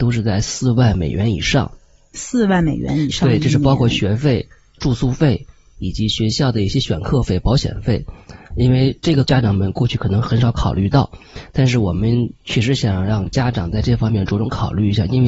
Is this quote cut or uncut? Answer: cut